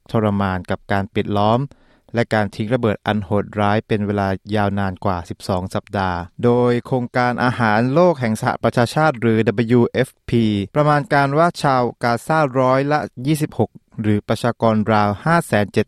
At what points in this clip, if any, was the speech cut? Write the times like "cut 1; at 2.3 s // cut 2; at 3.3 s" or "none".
cut 1; at 6.3 s // cut 2; at 10.7 s

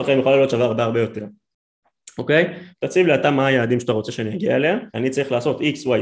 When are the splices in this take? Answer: cut 1; at 2.7 s // cut 2; at 4.9 s

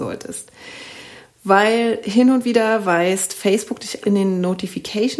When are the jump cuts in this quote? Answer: cut 1; at 4.0 s

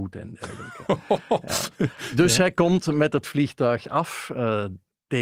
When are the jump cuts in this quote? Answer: none

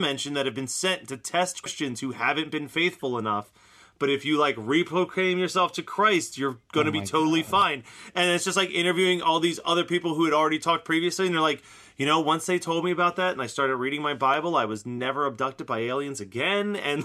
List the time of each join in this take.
none

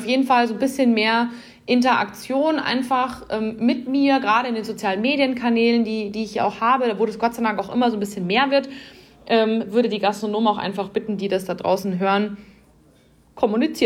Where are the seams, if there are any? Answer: none

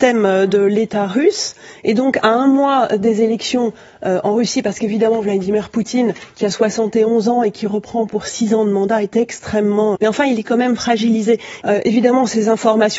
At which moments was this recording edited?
cut 1; at 10.0 s // cut 2; at 11.6 s

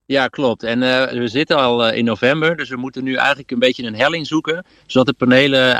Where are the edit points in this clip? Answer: cut 1; at 1.1 s

